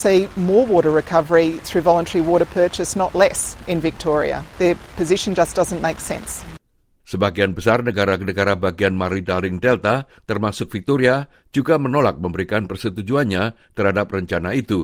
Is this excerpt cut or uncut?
cut